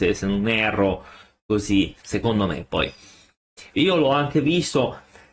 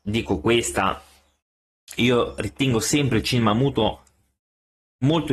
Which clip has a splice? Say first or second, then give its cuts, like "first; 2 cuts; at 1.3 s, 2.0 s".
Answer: first; 2 cuts; at 2.0 s, 3.8 s